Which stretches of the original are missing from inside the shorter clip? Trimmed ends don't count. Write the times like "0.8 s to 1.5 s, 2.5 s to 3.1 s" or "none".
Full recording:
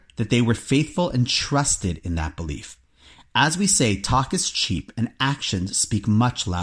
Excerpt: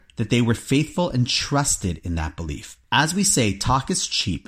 2.8 s to 3.3 s